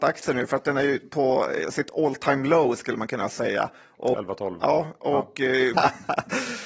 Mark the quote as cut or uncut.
cut